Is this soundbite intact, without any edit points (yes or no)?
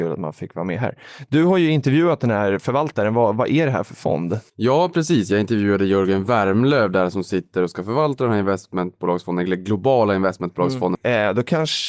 no